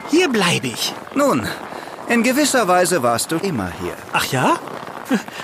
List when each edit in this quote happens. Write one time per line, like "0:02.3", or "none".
0:03.4